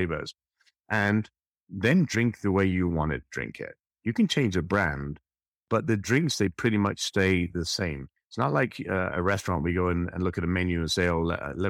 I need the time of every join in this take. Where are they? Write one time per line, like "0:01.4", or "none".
0:03.9